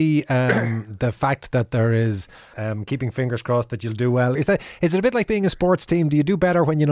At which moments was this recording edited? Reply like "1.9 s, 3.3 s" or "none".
2.5 s, 4.4 s